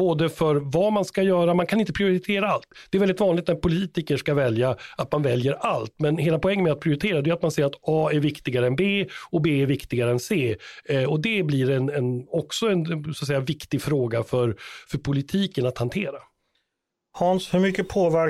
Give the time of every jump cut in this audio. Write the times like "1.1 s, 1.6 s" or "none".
none